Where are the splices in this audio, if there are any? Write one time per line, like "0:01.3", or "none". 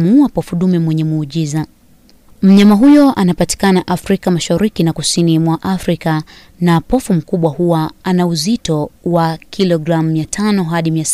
none